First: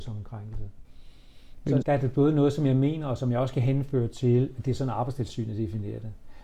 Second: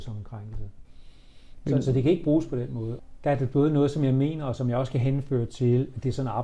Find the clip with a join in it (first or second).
first